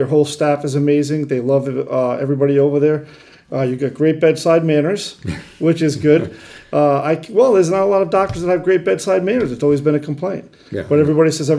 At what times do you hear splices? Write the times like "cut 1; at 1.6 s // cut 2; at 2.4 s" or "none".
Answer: none